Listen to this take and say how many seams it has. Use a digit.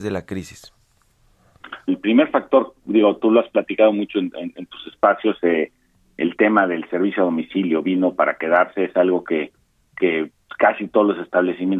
1